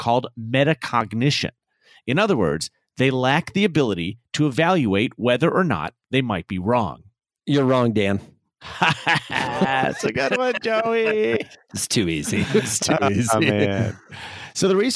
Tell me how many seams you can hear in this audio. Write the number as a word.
zero